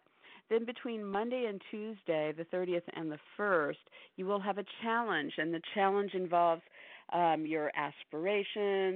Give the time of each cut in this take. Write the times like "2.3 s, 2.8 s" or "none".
none